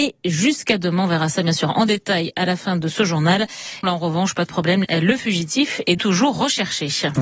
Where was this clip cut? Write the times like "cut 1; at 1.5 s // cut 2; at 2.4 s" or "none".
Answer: cut 1; at 3.8 s // cut 2; at 4.8 s // cut 3; at 6.0 s